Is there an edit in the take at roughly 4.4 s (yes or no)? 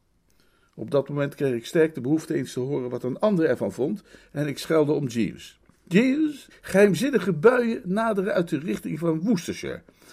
no